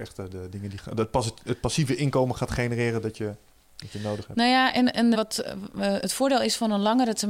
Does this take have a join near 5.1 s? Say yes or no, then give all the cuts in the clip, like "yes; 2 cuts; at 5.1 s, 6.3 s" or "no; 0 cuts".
yes; 1 cut; at 5.1 s